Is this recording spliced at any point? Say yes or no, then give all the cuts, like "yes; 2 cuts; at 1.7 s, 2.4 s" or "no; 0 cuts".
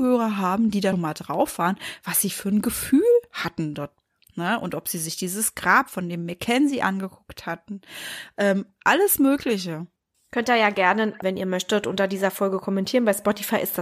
yes; 2 cuts; at 0.9 s, 11.2 s